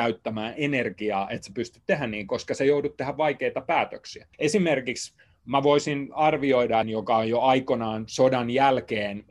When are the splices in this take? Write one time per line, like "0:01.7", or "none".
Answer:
0:04.3
0:06.8